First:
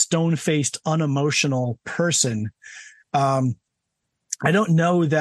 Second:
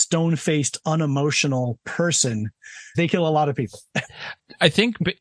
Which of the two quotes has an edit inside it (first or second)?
second